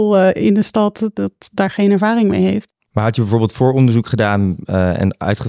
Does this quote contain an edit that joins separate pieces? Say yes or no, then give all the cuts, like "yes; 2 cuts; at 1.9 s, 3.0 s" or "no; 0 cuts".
no; 0 cuts